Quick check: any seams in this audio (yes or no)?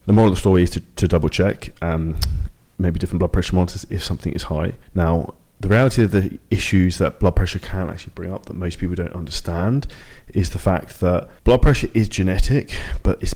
yes